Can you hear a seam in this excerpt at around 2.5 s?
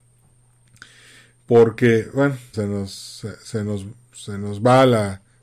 yes; 1 cut; at 2.5 s

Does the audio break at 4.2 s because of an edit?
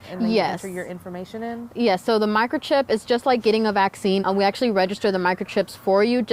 yes; 1 cut; at 4.2 s

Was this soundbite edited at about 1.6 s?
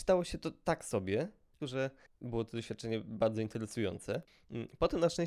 yes; 1 cut; at 1.6 s

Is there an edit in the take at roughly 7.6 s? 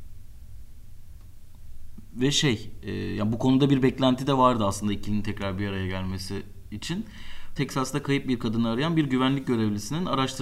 yes; 1 cut; at 7.6 s

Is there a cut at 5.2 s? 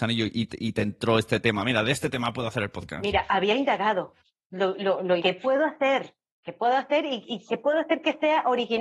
yes; 1 cut; at 5.2 s

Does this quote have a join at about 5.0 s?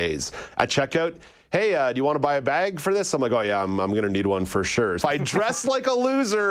yes; 1 cut; at 5.0 s

